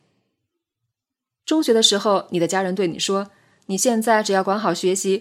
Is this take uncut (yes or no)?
yes